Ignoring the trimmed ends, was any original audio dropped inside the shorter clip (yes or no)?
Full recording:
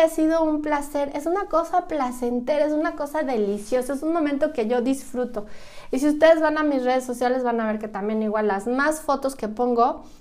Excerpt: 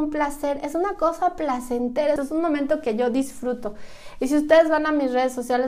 yes